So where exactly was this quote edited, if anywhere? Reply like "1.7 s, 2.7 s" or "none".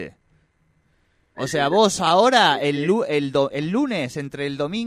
1.3 s, 3.5 s